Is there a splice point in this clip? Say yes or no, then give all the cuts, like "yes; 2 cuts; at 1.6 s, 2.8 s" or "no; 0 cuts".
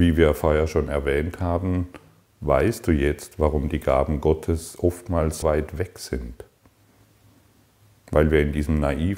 yes; 1 cut; at 5.4 s